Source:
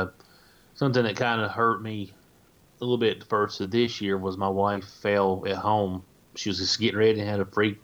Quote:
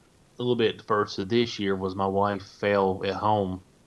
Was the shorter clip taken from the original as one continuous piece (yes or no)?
yes